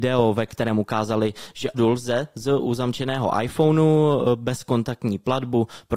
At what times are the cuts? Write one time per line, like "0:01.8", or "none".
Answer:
0:01.7